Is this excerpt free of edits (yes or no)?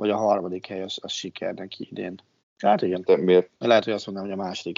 no